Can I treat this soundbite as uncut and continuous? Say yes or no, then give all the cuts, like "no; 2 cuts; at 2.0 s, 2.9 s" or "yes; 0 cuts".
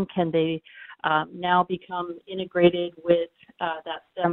yes; 0 cuts